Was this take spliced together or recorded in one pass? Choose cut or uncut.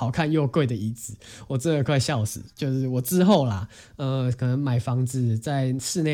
uncut